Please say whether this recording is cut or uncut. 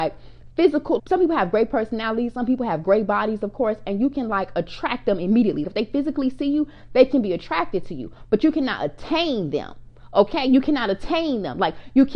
cut